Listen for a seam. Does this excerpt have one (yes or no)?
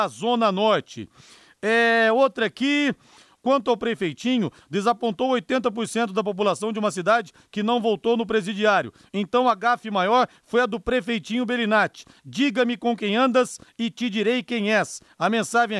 yes